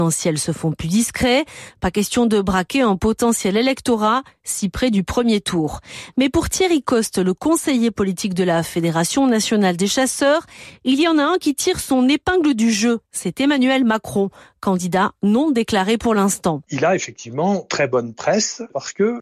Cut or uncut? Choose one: uncut